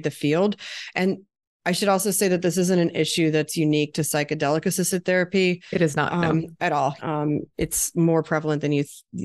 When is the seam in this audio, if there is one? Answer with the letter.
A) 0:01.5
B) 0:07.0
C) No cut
B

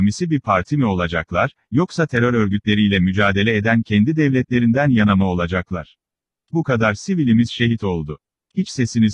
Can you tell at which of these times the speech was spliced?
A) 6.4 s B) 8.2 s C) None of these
A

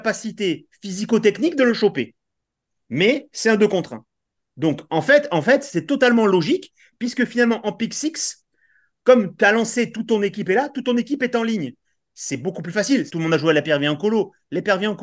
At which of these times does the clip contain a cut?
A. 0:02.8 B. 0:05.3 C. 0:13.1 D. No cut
C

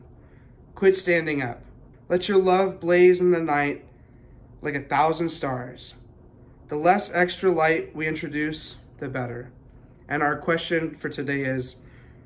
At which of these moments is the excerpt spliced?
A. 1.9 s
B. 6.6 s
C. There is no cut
A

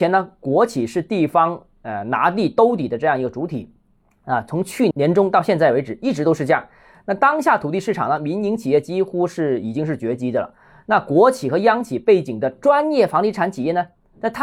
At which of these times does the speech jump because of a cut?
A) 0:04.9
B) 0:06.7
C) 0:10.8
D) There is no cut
A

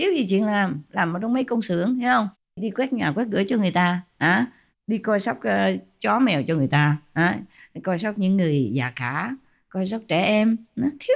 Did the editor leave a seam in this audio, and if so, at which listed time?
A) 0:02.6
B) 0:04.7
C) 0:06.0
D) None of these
A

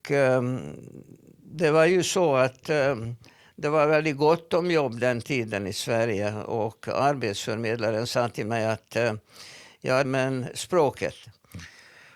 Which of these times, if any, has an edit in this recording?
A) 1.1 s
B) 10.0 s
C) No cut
B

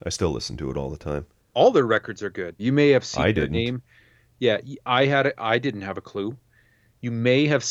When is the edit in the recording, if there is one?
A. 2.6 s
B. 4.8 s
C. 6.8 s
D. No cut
A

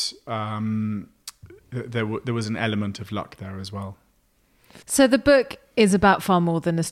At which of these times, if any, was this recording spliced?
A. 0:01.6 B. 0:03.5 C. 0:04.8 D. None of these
C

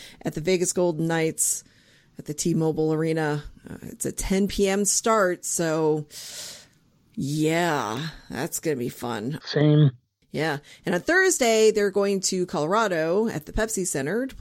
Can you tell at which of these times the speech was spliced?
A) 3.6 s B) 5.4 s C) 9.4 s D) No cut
C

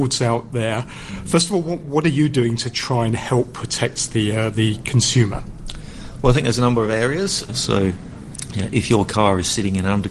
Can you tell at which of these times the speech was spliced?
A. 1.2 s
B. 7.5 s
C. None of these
B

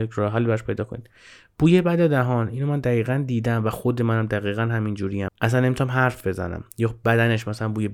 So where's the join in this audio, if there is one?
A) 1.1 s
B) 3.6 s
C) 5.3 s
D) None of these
C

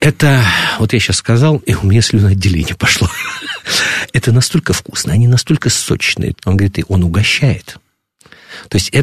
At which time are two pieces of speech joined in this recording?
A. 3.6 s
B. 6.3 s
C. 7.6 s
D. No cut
B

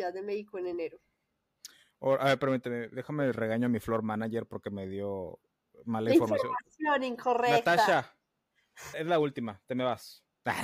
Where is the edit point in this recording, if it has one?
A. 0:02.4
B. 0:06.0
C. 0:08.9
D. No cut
C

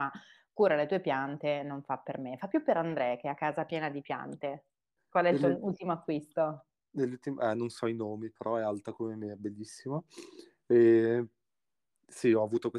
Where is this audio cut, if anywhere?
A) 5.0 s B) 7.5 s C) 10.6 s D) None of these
A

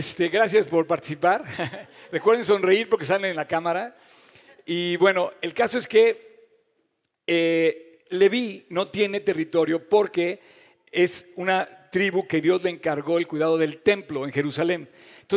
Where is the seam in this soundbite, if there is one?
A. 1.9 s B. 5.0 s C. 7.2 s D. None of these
D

